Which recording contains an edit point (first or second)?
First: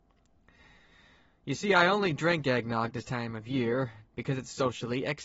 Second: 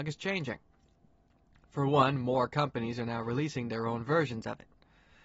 first